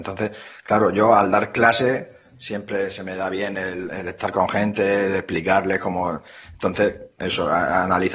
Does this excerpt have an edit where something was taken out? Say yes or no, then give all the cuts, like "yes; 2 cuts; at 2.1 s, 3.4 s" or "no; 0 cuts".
no; 0 cuts